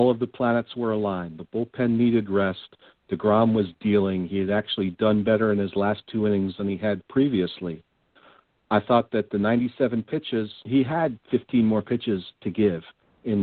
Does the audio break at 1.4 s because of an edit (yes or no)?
no